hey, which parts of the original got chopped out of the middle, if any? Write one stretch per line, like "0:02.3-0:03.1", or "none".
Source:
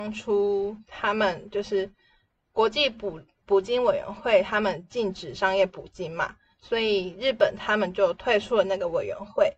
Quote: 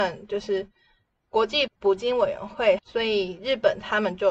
0:02.9-0:03.3
0:04.4-0:06.5